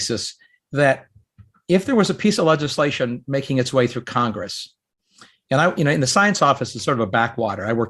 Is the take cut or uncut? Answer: uncut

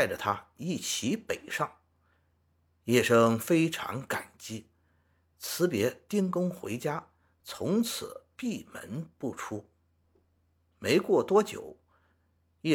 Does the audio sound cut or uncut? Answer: uncut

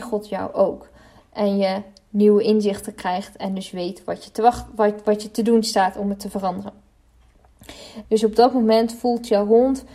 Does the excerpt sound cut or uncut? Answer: cut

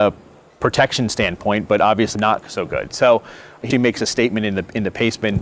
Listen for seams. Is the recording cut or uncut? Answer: cut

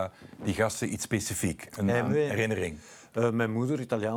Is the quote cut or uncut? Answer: uncut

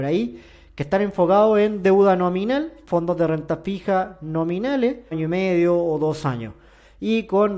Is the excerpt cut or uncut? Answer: cut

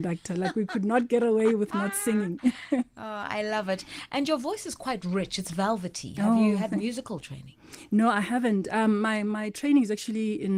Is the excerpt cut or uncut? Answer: uncut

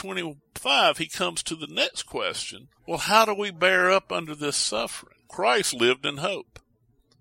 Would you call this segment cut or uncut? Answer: cut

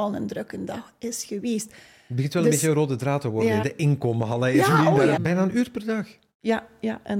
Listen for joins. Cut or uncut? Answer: cut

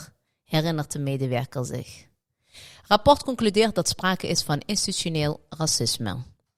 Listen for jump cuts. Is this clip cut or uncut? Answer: uncut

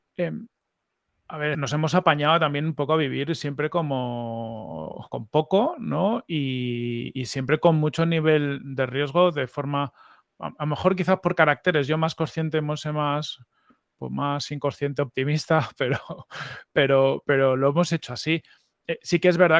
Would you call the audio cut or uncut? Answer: cut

